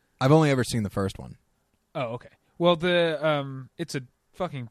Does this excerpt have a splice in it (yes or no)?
yes